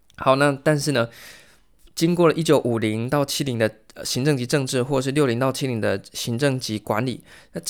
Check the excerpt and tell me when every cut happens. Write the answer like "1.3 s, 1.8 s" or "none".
none